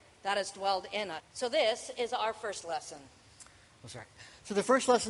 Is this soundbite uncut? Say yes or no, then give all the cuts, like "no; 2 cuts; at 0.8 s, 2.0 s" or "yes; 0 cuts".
no; 1 cut; at 1.2 s